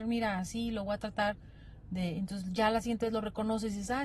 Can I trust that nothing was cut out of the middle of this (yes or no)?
yes